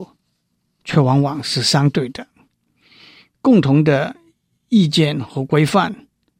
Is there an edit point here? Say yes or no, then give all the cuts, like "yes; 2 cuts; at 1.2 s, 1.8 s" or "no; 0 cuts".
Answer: no; 0 cuts